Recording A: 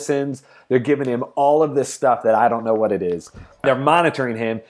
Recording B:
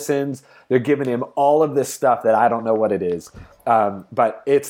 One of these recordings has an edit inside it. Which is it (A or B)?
A